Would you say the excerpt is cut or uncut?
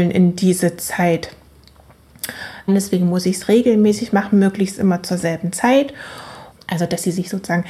cut